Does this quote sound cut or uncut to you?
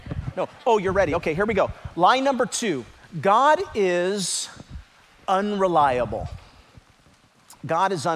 uncut